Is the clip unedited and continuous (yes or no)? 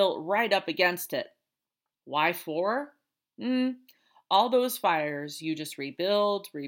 no